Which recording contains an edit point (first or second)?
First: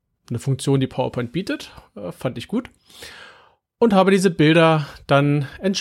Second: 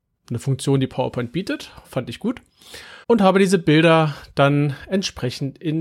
second